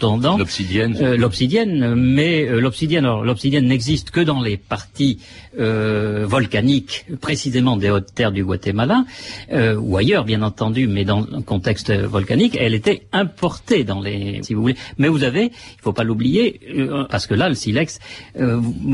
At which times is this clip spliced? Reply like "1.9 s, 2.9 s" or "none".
14.4 s, 17.1 s